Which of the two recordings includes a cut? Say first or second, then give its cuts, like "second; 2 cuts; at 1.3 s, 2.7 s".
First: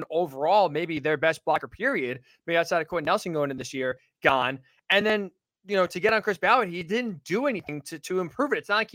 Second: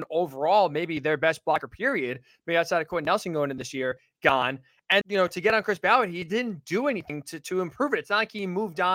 second; 1 cut; at 5.0 s